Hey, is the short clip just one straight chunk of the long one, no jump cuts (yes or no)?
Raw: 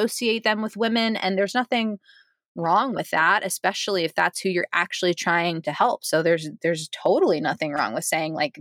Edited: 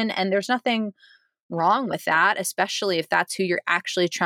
yes